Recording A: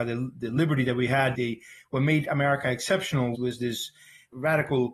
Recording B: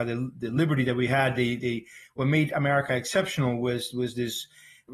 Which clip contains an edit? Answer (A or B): A